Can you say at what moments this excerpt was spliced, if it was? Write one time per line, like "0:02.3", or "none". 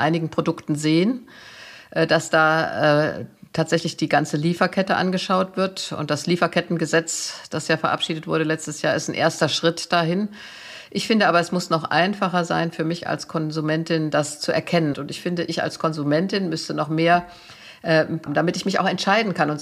0:14.9
0:18.3